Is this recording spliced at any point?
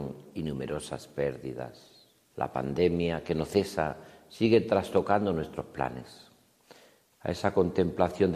yes; 2 cuts; at 2.3 s, 7.1 s

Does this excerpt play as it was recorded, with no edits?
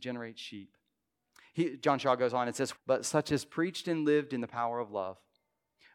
no; 1 cut; at 2.8 s

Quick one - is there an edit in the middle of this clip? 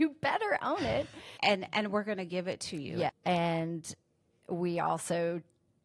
yes; 2 cuts; at 1.4 s, 3.1 s

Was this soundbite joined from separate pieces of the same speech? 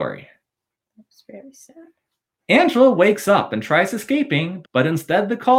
yes; 1 cut; at 4.6 s

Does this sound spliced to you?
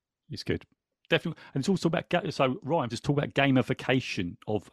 yes; 1 cut; at 2.9 s

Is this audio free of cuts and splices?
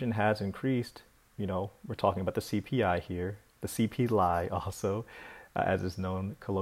yes; 0 cuts

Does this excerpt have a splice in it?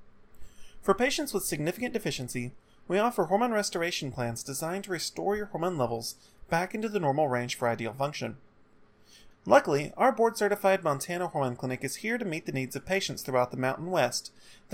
yes; 1 cut; at 9.3 s

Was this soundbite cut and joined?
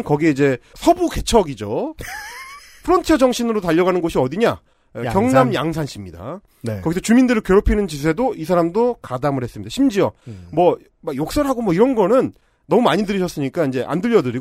no; 0 cuts

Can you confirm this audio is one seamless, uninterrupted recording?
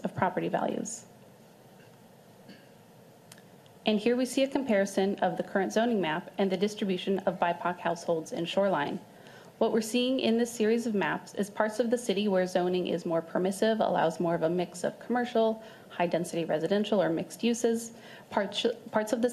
no; 1 cut; at 18.2 s

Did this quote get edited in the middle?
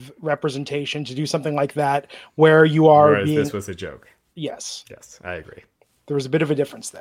no; 0 cuts

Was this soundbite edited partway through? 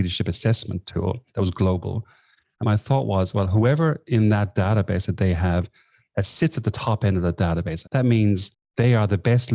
yes; 2 cuts; at 2.6 s, 7.8 s

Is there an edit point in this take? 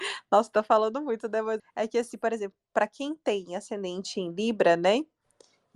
yes; 1 cut; at 1.6 s

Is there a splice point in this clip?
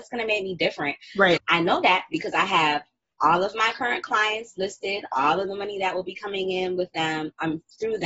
yes; 1 cut; at 1.4 s

